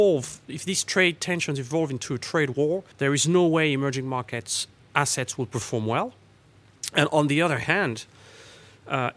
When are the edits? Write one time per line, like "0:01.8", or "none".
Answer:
0:02.9